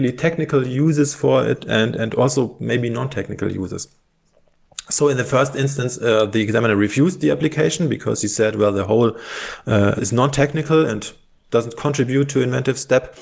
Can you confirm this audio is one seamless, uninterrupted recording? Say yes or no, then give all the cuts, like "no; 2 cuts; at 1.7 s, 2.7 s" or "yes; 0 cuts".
no; 1 cut; at 10.0 s